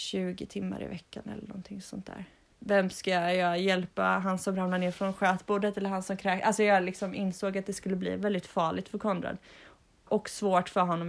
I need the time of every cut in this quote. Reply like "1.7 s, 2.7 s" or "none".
2.5 s